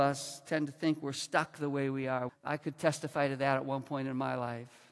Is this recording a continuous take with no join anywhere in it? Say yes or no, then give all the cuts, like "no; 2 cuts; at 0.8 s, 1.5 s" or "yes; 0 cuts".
no; 1 cut; at 2.3 s